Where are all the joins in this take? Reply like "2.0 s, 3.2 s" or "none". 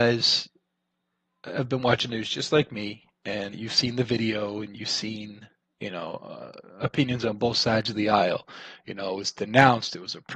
3.5 s